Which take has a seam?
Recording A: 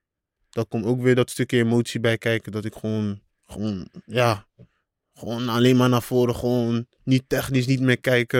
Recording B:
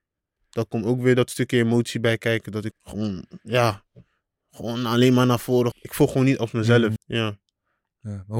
B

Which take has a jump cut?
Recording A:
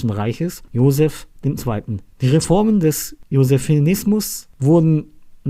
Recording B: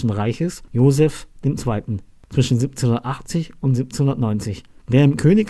A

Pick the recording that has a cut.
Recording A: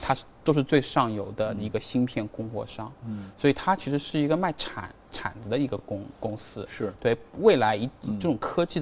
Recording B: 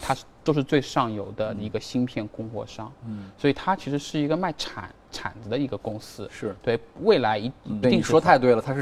B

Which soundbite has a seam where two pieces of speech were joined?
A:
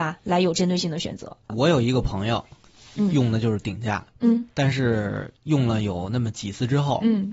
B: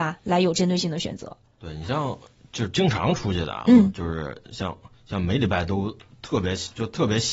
A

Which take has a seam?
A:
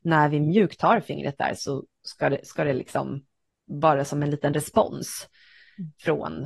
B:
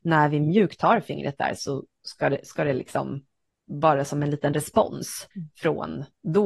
B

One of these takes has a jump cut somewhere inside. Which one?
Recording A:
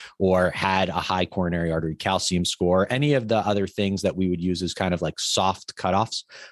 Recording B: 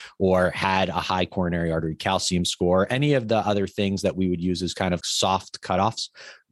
B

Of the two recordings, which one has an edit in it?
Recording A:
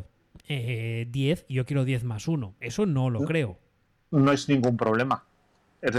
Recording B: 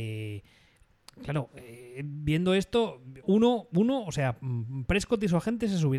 B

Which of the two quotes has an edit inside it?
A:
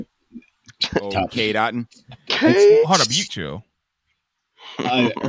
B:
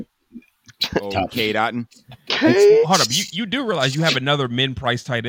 A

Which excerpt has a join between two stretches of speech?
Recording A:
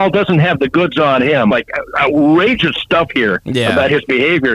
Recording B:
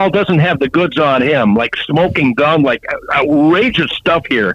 A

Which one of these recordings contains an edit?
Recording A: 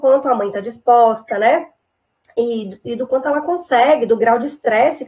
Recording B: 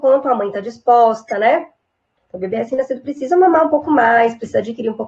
B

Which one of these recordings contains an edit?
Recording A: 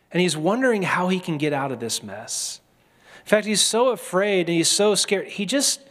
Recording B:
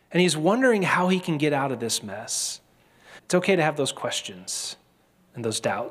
B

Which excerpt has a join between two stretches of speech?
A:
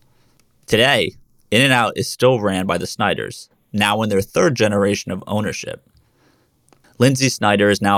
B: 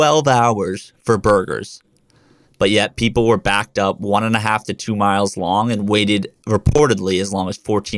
B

